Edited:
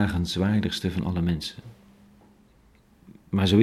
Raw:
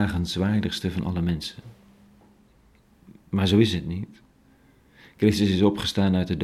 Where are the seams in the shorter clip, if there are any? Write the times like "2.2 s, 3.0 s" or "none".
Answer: none